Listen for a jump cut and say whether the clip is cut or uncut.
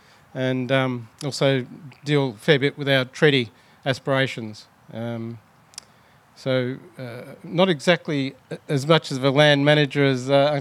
uncut